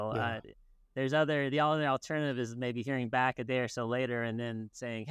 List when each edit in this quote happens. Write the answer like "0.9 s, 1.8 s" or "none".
none